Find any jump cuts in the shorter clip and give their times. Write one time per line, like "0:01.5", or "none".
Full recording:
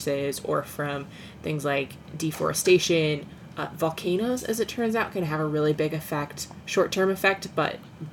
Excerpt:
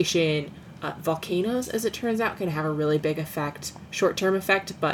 none